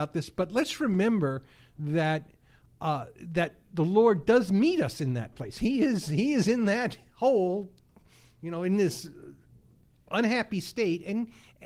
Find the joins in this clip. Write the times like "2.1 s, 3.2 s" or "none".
none